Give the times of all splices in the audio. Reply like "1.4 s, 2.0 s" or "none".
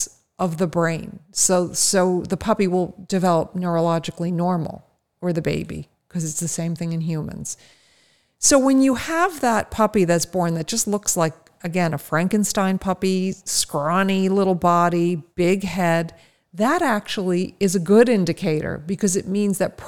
none